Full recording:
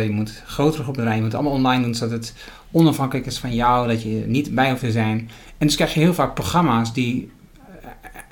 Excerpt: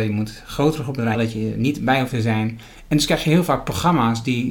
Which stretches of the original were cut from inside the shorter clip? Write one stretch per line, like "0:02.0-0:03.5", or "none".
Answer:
0:01.1-0:03.8